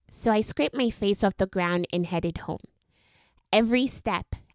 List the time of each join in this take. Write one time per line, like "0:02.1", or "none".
none